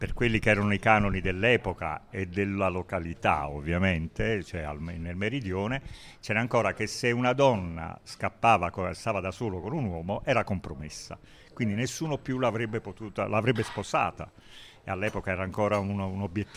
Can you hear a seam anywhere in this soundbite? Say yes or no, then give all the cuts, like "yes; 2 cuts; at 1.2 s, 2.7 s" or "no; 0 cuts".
no; 0 cuts